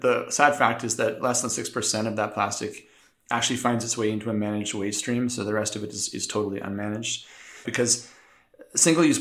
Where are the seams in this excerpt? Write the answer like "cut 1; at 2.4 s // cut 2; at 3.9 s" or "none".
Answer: cut 1; at 7.6 s